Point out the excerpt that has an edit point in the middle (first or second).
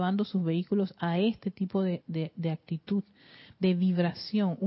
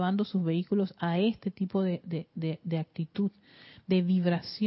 first